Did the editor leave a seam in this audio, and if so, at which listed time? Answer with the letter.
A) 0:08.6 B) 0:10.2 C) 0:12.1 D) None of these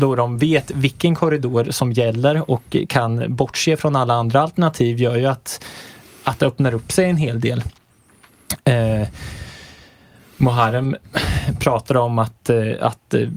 D